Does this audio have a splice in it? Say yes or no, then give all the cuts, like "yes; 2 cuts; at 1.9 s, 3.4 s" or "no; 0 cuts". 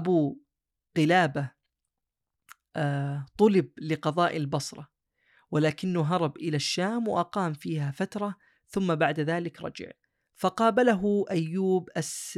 no; 0 cuts